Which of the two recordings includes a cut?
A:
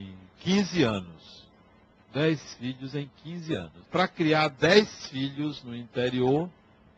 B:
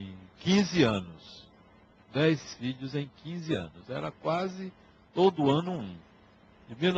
A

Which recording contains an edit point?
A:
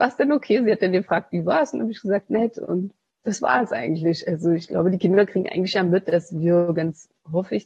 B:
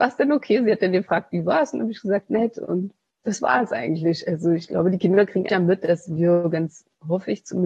B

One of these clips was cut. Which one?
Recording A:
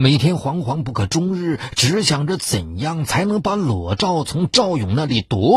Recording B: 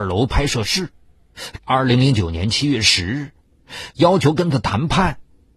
B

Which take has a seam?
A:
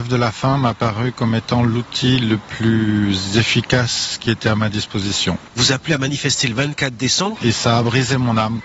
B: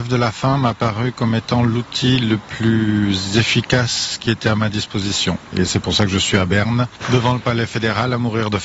A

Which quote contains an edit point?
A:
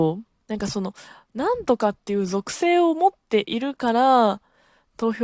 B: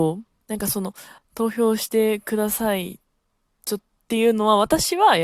B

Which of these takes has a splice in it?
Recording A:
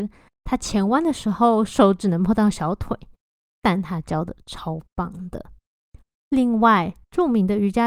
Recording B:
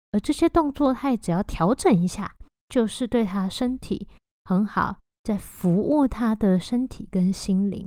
B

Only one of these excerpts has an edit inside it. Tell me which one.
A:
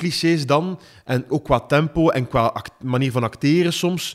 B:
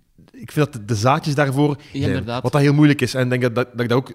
B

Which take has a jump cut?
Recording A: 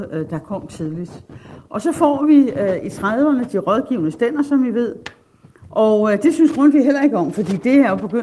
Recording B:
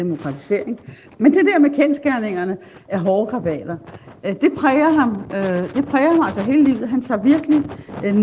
B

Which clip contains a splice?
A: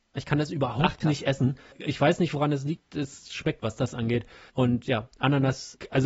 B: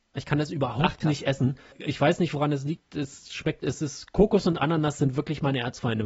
A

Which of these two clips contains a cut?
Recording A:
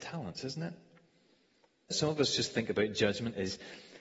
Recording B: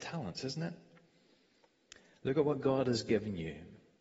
A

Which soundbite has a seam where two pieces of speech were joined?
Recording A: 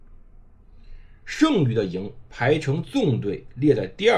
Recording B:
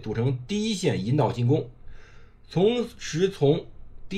A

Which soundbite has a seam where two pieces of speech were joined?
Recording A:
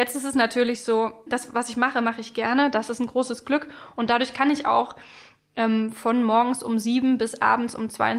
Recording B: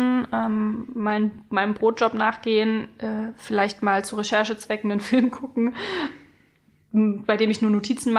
A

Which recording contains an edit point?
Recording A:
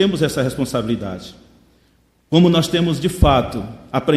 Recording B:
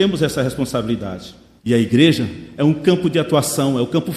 B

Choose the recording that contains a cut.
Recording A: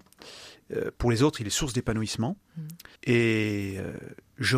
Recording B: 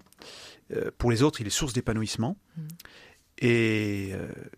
A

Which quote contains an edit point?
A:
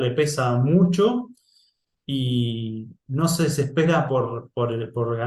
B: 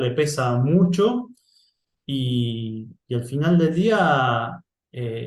A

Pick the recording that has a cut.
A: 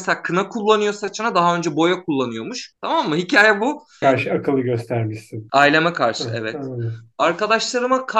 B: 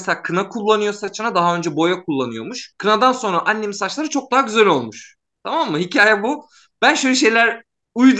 A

